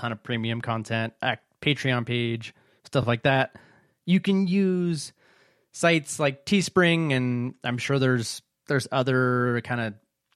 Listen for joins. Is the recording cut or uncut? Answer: uncut